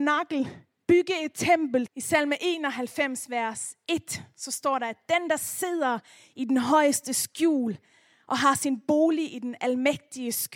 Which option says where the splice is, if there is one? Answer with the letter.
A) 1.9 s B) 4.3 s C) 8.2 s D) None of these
A